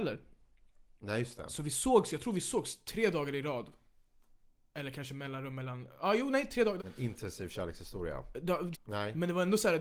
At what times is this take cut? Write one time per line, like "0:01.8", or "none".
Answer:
0:06.8
0:08.7